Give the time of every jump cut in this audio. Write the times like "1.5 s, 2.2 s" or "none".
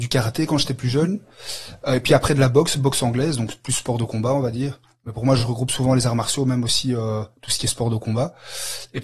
none